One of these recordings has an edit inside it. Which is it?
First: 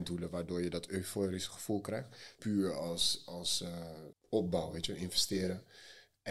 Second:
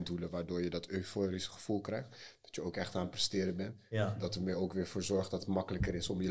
first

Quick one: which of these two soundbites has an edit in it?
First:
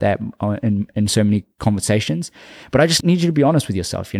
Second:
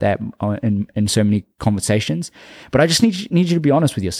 first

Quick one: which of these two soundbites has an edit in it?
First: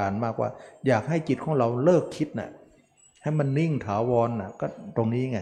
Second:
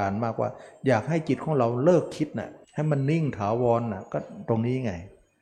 second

